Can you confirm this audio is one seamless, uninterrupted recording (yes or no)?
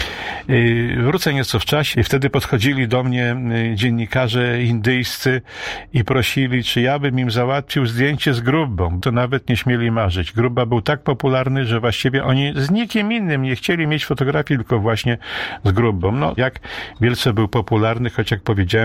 no